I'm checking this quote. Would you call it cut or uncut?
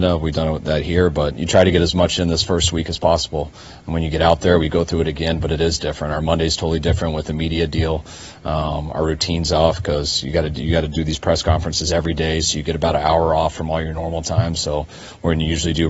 uncut